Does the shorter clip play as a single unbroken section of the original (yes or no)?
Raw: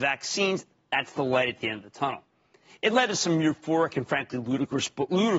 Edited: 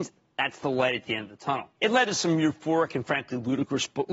no